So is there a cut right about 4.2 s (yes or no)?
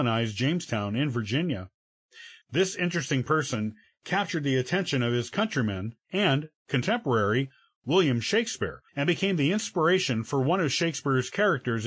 no